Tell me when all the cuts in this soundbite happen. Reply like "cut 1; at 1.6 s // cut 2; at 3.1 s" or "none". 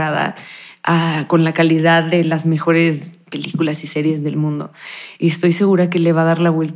cut 1; at 5.2 s